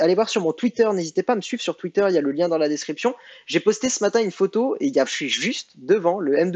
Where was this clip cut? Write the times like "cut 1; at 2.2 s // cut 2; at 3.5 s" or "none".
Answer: cut 1; at 5.1 s